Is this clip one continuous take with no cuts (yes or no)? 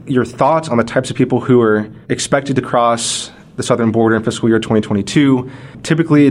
no